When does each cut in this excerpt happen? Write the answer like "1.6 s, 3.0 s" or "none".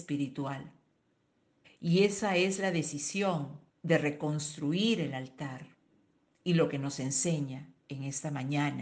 1.6 s, 3.7 s